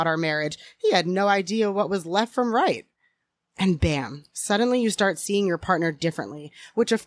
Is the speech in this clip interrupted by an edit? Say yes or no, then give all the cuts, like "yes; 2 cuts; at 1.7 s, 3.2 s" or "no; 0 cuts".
yes; 1 cut; at 3.4 s